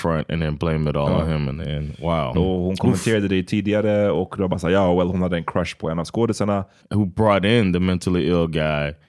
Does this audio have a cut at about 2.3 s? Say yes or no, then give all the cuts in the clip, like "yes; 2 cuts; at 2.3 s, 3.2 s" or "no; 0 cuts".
yes; 2 cuts; at 2.3 s, 6.8 s